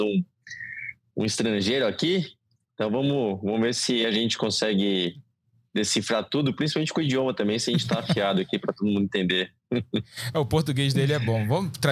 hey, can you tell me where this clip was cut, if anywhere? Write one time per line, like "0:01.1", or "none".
none